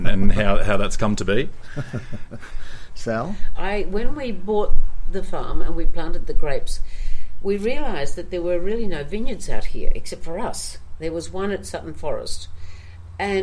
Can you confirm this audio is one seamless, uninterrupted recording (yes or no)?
no